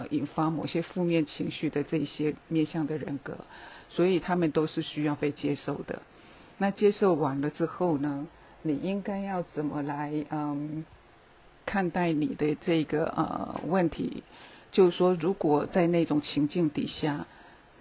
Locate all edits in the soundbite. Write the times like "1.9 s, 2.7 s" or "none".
none